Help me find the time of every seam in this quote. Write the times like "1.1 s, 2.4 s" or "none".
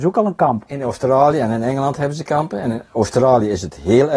none